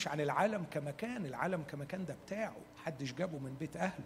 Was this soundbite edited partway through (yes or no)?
yes